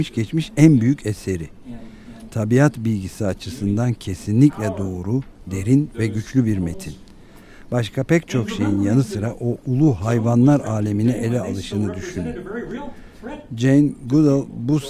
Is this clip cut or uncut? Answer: uncut